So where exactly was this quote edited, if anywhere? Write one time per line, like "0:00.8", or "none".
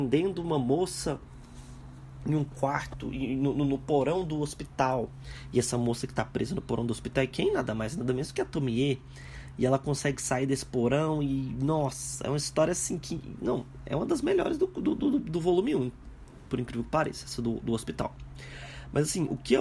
none